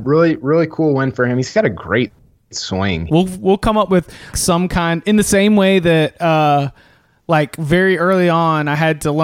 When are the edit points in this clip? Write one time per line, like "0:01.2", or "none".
0:03.1
0:04.3